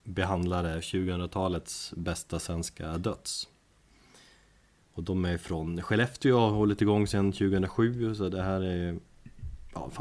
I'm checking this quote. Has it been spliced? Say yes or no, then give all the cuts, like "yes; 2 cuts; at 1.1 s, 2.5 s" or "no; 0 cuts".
no; 0 cuts